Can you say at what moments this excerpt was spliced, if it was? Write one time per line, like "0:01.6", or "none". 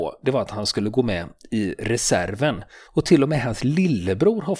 0:02.9